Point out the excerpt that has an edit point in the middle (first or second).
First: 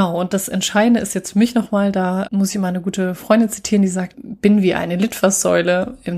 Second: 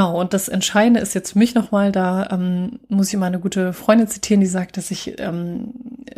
first